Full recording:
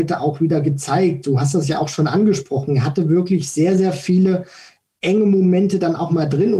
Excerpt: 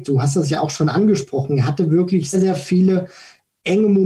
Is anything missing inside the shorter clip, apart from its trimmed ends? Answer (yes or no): yes